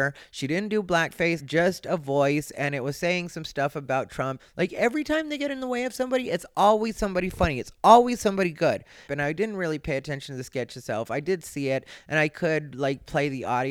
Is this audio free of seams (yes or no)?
no